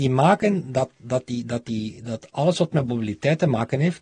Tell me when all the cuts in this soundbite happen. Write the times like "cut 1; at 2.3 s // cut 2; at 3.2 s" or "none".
none